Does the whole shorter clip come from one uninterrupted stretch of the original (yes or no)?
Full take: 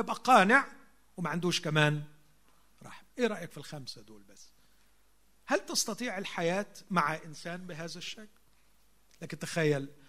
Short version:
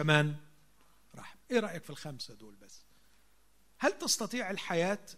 yes